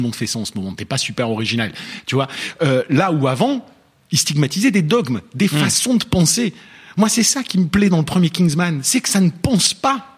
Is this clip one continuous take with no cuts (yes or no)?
yes